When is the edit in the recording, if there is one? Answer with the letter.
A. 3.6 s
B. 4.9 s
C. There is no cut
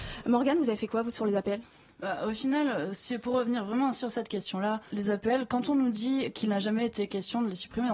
B